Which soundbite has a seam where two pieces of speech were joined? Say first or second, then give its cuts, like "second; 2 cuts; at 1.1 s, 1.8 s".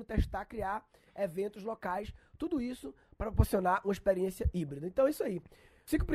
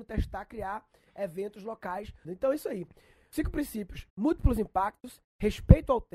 second; 2 cuts; at 2.2 s, 4.1 s